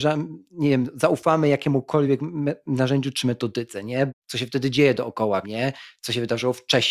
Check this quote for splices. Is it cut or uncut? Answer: cut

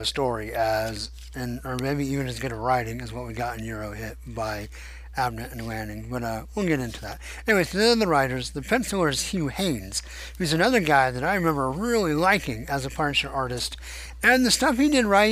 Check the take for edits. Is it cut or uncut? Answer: uncut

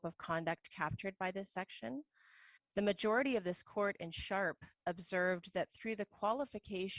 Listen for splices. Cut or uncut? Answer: cut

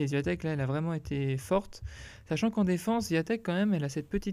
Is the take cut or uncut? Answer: uncut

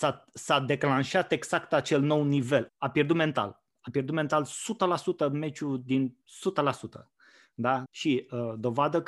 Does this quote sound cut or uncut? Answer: cut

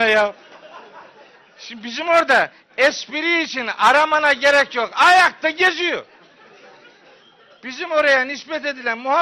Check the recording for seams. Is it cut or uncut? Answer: uncut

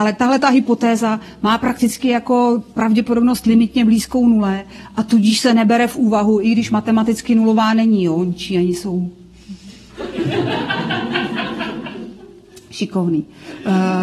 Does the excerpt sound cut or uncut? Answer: uncut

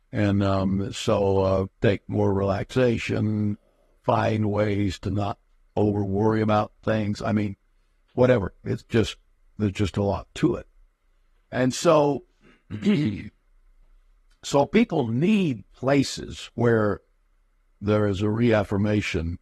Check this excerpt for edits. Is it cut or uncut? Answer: cut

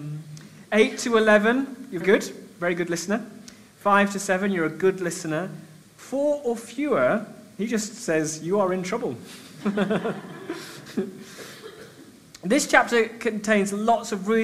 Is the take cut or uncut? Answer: cut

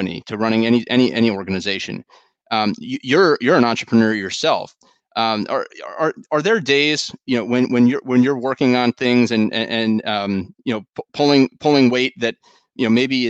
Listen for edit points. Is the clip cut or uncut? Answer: uncut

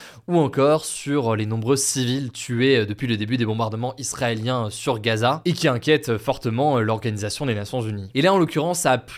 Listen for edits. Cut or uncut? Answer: uncut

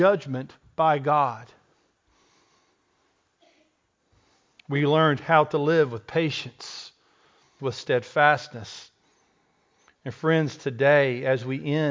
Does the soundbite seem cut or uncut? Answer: cut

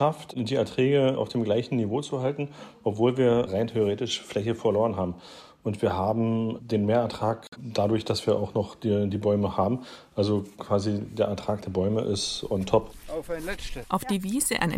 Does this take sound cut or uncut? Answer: cut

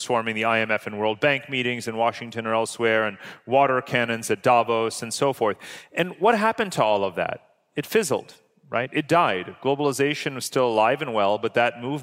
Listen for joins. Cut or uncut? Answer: uncut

